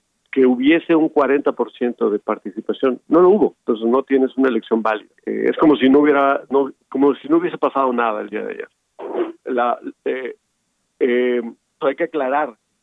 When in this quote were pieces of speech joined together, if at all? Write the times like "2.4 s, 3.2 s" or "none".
5.2 s, 9.4 s, 11.8 s